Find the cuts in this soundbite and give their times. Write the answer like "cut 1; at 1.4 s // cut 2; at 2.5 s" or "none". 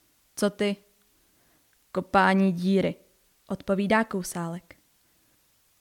none